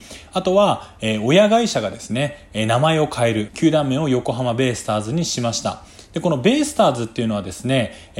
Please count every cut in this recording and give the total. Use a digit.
1